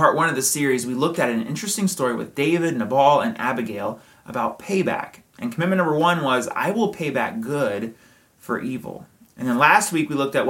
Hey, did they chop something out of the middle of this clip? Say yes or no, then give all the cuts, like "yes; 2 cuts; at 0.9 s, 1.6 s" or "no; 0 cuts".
no; 0 cuts